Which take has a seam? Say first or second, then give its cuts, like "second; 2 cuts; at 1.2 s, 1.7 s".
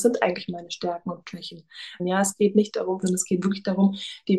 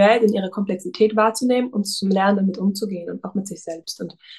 first; 2 cuts; at 2.0 s, 3.0 s